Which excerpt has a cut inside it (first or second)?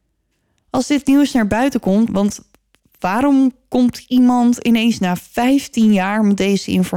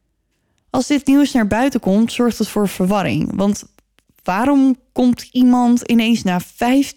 first